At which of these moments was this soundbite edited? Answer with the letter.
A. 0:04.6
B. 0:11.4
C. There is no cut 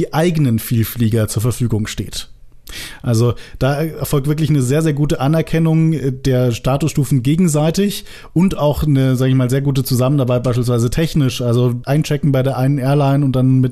C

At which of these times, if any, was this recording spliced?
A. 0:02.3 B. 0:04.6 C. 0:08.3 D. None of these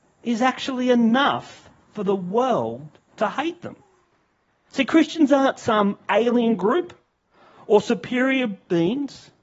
D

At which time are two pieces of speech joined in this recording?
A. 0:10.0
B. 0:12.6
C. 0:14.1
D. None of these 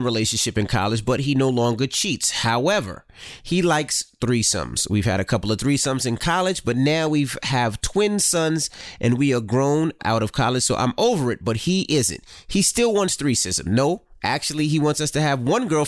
A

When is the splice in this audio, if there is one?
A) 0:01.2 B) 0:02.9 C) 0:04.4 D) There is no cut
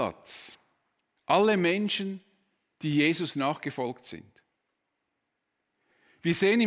A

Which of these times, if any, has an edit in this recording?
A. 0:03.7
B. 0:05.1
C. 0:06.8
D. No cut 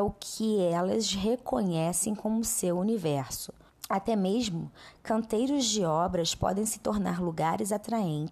A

